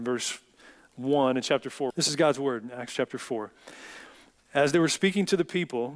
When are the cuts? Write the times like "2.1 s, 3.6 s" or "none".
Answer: 1.9 s

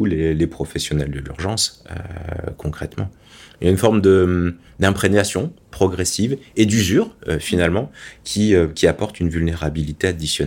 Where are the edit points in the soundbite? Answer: none

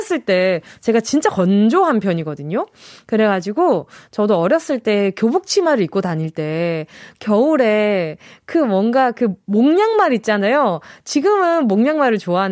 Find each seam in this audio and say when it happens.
none

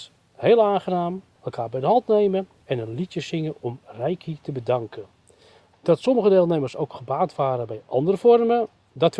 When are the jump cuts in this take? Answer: 1.4 s, 5.7 s

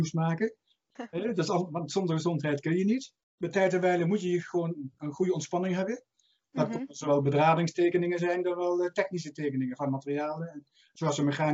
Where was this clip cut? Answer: 0.9 s, 3.2 s, 6.4 s

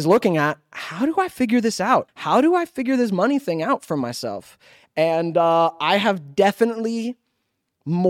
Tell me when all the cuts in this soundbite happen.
2.1 s

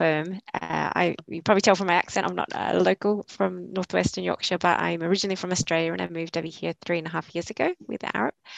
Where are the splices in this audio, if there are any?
none

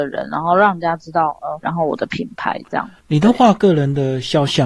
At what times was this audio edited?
1.6 s

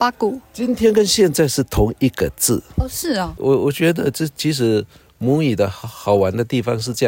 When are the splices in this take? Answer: 3.4 s

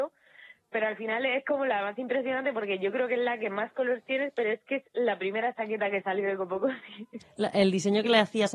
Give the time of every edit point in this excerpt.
7.2 s

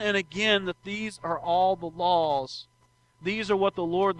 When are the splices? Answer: none

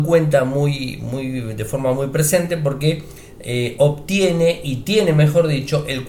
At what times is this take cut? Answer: none

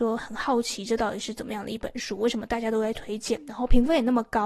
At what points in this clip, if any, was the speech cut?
none

